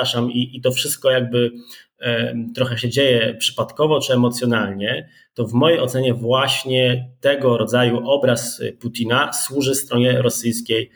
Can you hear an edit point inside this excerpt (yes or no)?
no